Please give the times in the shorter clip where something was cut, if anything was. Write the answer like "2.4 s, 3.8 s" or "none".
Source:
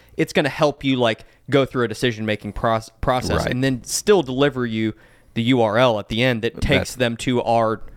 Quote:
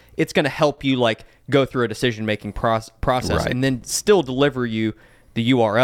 none